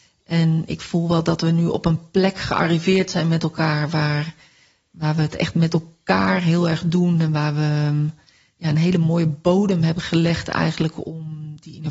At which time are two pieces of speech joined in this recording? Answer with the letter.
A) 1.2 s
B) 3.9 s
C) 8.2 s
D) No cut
D